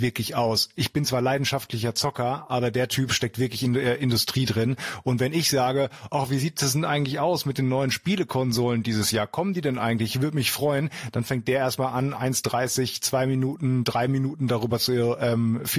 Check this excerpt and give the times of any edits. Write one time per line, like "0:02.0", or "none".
none